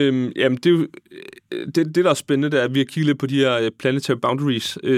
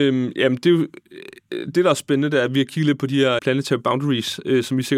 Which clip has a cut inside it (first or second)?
second